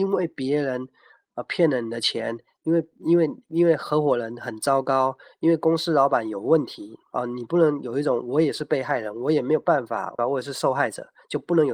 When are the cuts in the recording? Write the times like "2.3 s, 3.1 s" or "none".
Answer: 7.1 s, 10.2 s